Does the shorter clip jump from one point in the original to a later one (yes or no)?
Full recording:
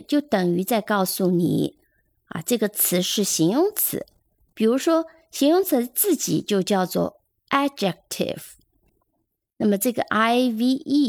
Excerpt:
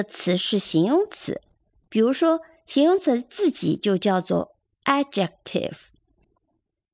no